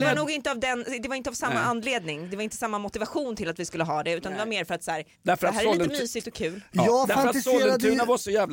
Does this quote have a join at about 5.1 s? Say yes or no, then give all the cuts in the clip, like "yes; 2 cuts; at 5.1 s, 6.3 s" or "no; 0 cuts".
yes; 1 cut; at 5.1 s